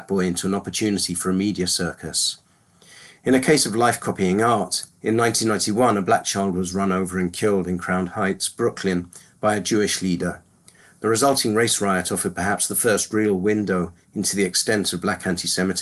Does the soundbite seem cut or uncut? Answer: uncut